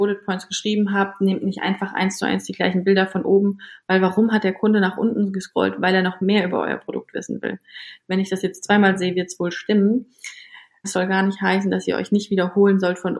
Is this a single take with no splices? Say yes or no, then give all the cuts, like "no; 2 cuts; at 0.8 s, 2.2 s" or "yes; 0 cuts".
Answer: no; 2 cuts; at 8.0 s, 10.8 s